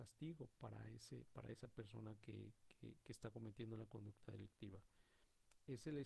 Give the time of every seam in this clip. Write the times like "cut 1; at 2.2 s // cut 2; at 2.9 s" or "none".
none